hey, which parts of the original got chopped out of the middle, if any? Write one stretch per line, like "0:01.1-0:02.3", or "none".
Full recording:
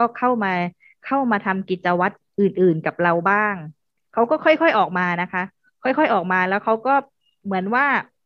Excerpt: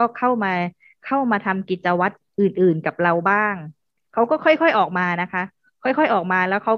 none

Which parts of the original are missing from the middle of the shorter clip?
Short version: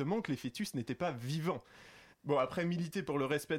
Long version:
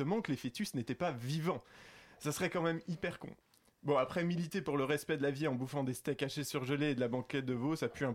0:02.1-0:03.7

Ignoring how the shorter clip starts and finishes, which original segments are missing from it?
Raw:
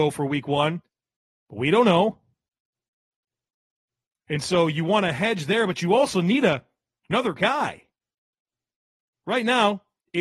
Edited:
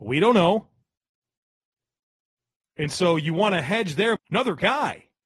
0:05.7-0:06.9

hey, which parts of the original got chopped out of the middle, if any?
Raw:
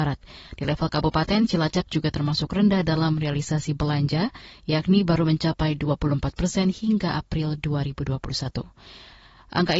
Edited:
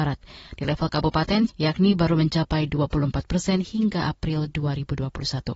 0:01.5-0:04.6

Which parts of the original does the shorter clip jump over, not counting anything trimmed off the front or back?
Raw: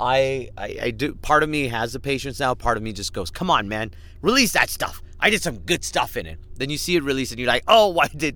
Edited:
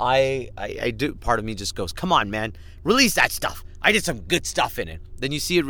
0:01.2-0:02.6

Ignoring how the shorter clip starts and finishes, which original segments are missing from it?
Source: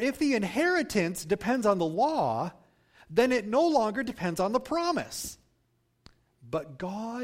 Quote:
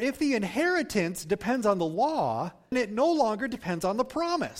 0:02.7-0:03.3

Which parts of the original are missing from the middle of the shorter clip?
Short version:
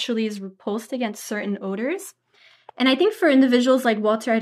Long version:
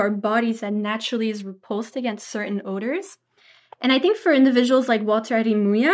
none

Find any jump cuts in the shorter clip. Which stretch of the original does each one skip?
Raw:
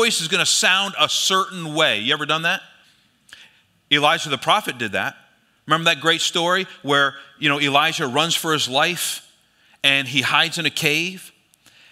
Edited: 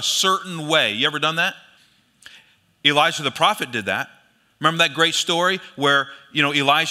none

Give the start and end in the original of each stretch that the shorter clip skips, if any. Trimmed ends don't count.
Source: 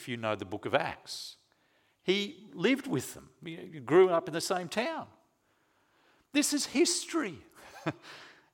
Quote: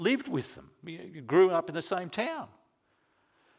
none

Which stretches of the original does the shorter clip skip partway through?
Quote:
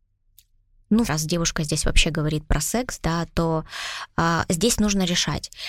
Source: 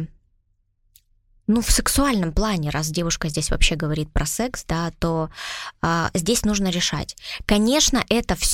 0:01.6-0:02.7

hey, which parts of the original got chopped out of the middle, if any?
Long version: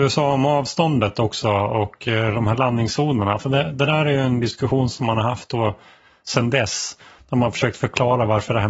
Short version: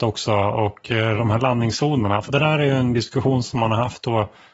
0:03.4-0:03.7

